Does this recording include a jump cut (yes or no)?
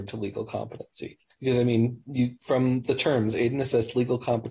no